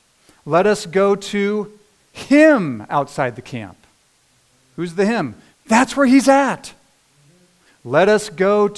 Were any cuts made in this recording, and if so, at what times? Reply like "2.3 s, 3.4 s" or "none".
5.5 s, 7.7 s